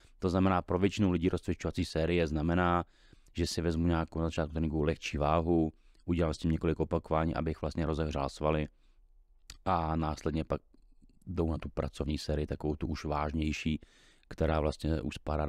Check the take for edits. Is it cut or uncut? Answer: uncut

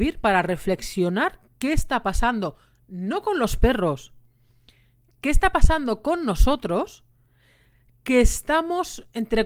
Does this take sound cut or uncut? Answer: uncut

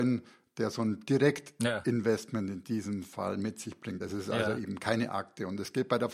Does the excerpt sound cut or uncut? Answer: uncut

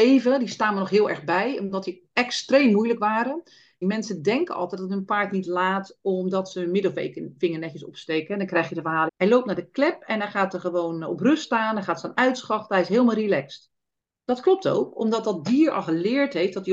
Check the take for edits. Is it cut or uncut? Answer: cut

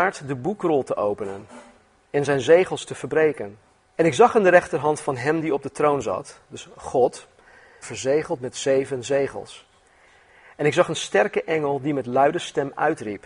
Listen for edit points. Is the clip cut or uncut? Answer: cut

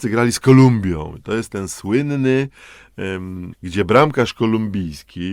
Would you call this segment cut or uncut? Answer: cut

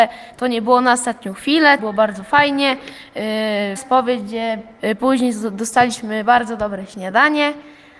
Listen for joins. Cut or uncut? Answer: cut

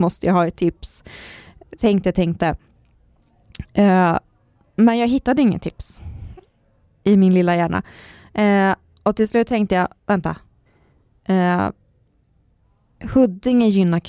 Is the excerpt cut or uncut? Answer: uncut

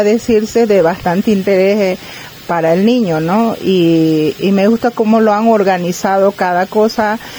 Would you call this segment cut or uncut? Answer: uncut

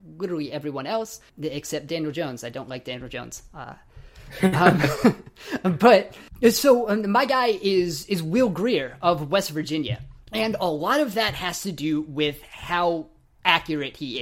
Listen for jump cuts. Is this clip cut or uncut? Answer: uncut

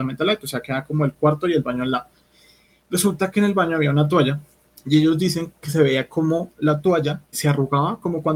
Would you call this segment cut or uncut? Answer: cut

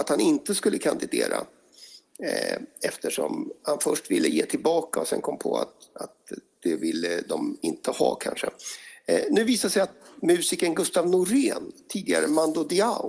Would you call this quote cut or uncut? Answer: uncut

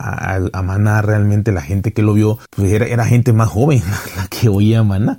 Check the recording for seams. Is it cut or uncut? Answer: cut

